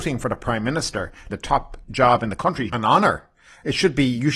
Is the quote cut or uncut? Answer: cut